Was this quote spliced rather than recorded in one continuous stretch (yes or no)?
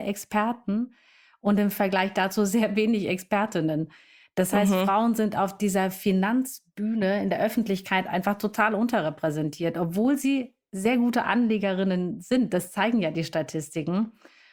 no